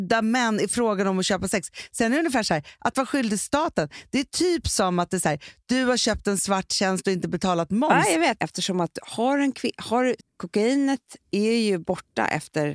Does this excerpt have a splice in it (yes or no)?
yes